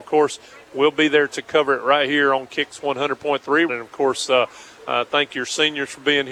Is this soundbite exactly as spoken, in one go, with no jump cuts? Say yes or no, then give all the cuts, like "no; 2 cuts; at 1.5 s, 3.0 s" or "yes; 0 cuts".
no; 1 cut; at 3.7 s